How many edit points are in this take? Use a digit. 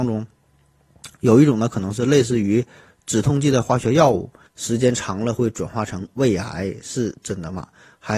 1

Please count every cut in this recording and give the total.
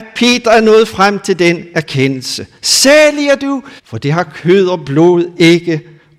1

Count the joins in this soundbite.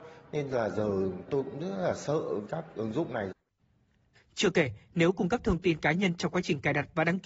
1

